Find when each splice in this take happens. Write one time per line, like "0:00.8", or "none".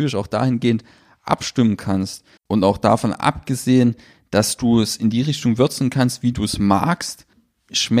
0:02.4